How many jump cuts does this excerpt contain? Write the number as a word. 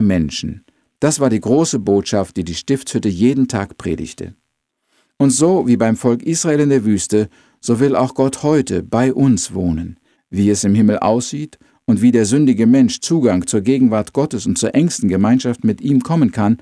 one